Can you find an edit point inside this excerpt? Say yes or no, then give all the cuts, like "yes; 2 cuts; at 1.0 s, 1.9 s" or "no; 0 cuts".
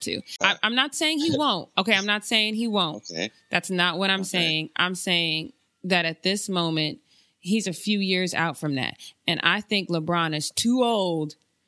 no; 0 cuts